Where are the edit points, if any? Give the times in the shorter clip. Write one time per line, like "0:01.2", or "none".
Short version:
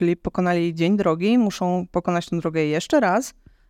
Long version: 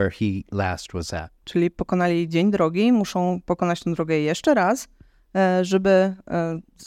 none